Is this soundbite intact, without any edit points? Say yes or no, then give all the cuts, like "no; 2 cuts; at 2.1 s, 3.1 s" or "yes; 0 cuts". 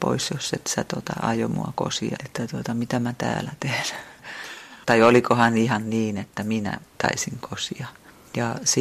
no; 2 cuts; at 2.2 s, 4.8 s